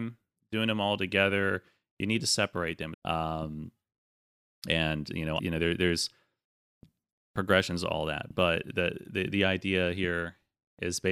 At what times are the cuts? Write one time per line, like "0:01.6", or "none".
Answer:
0:02.9
0:05.4